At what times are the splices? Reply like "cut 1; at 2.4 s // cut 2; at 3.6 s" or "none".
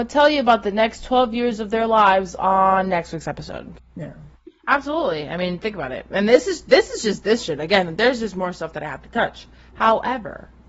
cut 1; at 3.8 s